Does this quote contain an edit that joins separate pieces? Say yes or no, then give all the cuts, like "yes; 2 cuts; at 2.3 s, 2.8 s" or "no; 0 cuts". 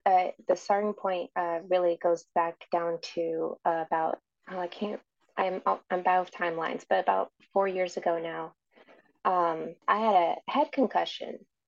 yes; 1 cut; at 9.8 s